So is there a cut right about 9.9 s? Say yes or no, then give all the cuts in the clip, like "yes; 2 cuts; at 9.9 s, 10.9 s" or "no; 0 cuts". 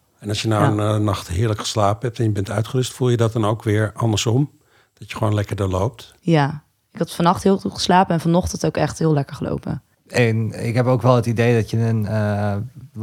yes; 1 cut; at 9.9 s